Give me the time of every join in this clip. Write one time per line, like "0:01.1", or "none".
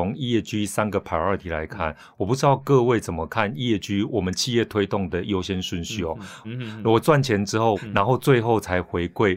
0:06.4
0:07.8